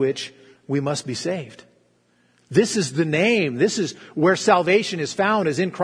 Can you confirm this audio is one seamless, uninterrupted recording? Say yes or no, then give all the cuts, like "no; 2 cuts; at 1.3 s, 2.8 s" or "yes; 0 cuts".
yes; 0 cuts